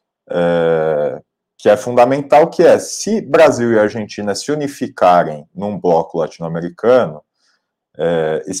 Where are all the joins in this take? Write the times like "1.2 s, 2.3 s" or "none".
none